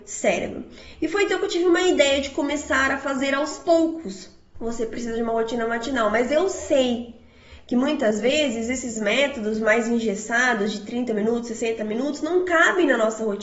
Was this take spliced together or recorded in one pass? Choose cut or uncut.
cut